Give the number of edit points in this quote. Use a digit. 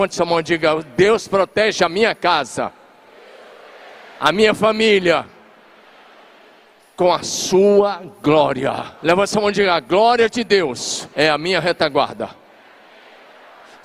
2